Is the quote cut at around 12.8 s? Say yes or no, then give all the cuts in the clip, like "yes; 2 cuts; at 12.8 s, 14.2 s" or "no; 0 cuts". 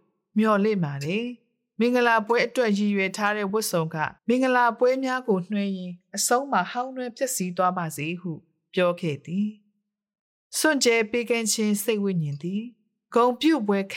no; 1 cut; at 4.2 s